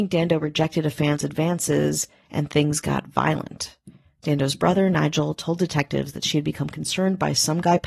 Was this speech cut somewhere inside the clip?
no; 0 cuts

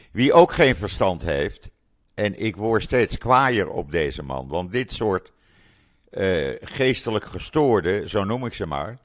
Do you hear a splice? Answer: no; 0 cuts

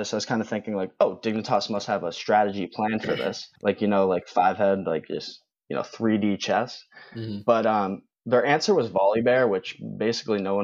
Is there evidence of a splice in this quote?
yes; 1 cut; at 3.6 s

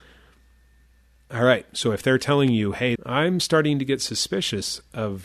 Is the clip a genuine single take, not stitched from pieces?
no; 1 cut; at 3.0 s

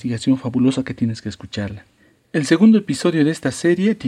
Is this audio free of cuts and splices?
yes; 0 cuts

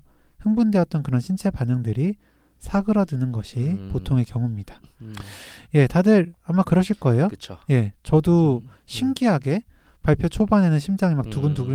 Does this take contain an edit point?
no; 0 cuts

